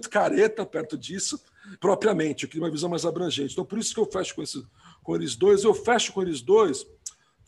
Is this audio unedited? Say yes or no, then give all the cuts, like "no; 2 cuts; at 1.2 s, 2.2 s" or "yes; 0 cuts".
no; 1 cut; at 1.8 s